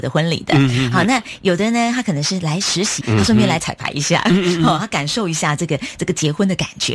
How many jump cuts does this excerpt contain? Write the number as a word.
one